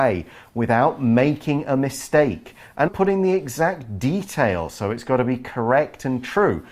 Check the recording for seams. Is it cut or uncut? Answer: cut